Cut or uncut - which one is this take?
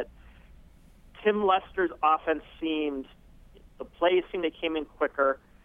cut